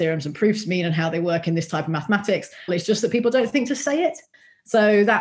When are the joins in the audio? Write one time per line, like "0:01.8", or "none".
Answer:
0:02.7